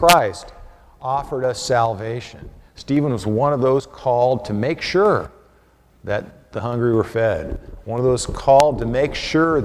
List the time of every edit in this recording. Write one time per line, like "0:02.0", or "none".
0:02.7